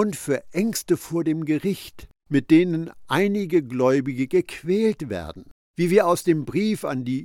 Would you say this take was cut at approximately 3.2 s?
no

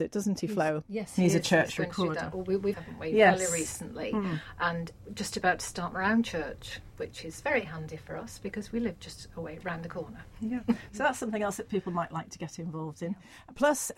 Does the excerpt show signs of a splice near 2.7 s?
yes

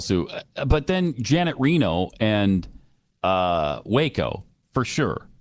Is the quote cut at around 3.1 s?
no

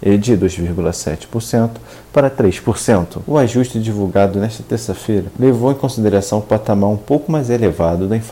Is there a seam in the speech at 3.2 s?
yes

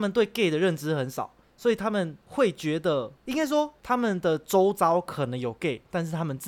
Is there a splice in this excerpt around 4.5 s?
no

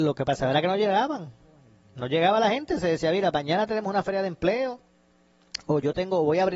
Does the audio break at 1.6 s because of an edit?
no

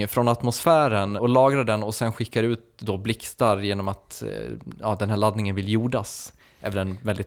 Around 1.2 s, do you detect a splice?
yes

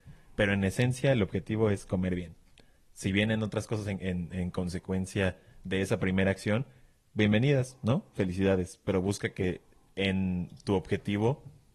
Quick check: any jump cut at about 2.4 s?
no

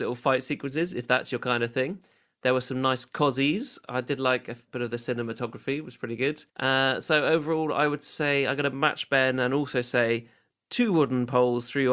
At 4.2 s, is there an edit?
no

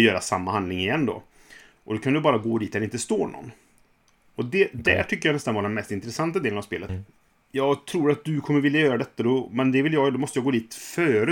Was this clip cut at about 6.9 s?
yes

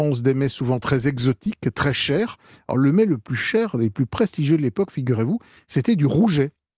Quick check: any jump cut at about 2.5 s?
no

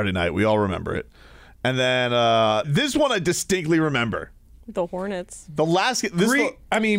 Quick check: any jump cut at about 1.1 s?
no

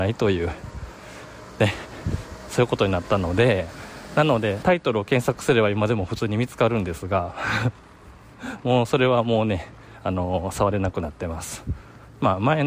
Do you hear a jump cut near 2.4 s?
no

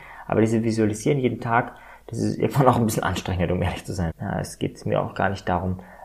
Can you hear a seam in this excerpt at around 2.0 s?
no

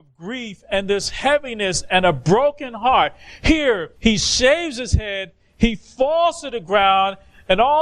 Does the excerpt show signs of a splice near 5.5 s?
no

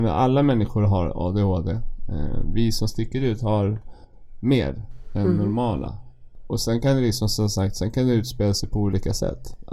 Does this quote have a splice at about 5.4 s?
no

